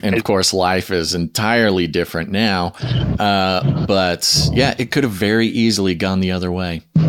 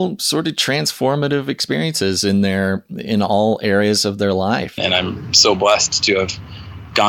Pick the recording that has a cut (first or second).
second